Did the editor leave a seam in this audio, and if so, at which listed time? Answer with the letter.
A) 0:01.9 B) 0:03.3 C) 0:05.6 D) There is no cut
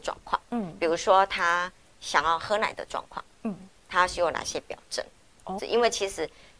C